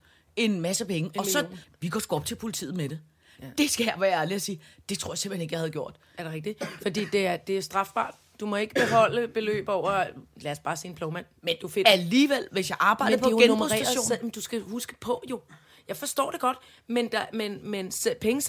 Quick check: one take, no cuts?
no; 1 cut; at 1.6 s

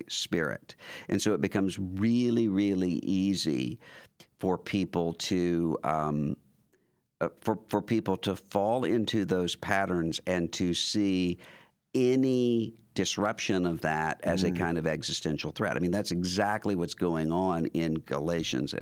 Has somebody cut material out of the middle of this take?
no; 0 cuts

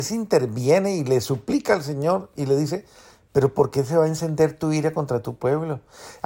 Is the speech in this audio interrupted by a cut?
no; 0 cuts

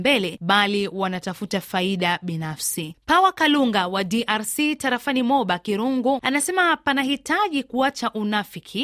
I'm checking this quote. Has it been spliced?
yes; 2 cuts; at 2.9 s, 6.2 s

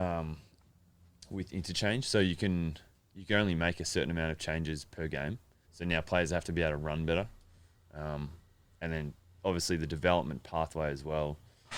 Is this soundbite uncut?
no; 1 cut; at 5.6 s

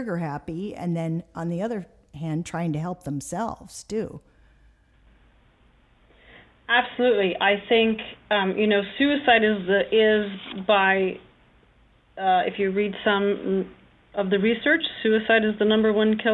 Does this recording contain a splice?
no; 0 cuts

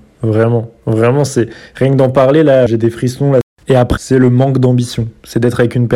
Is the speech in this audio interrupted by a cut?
yes; 2 cuts; at 2.7 s, 4.0 s

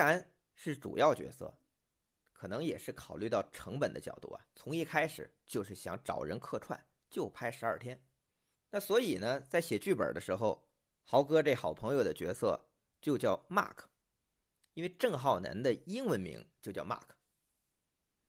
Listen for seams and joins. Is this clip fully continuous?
no; 1 cut; at 8.5 s

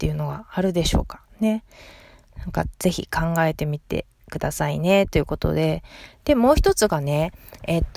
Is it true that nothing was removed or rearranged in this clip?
yes; 0 cuts

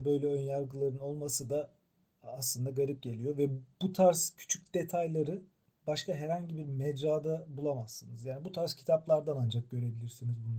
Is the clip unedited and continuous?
yes; 0 cuts

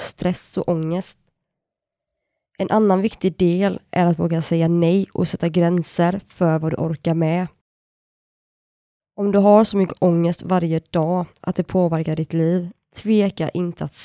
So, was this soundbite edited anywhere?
no; 0 cuts

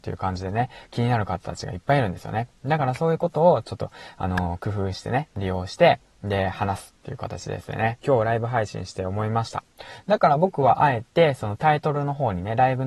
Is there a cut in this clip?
yes; 1 cut; at 8.0 s

